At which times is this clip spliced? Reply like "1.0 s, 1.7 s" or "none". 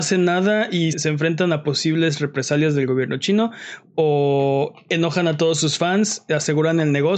0.9 s